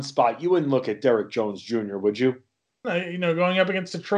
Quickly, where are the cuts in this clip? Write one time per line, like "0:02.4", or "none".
0:02.8